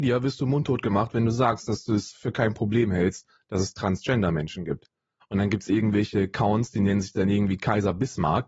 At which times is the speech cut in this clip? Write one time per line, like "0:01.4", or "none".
0:05.2

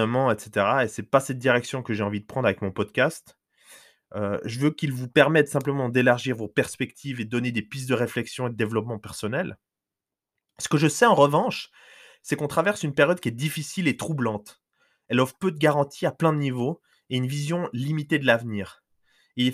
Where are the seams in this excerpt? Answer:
none

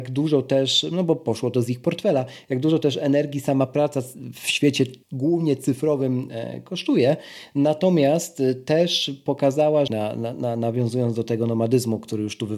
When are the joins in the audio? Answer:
0:05.0
0:09.9

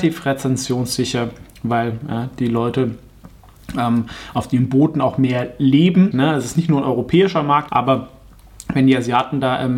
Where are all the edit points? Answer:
0:06.1
0:07.7

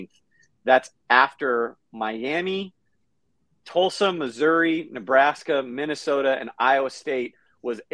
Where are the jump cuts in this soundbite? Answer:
none

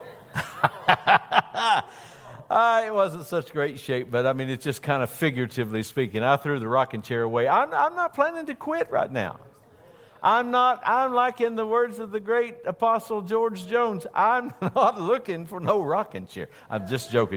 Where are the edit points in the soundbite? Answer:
none

